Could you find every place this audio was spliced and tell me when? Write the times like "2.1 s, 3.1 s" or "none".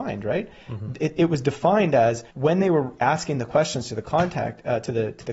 2.3 s